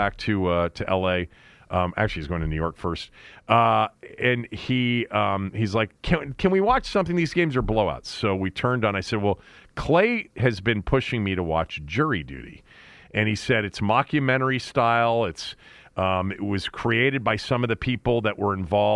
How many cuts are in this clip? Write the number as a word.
zero